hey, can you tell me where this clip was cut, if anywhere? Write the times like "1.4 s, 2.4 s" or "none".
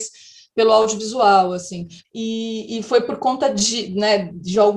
2.0 s